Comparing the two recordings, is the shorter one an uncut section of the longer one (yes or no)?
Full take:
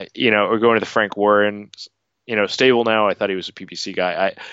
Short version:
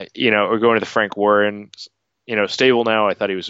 yes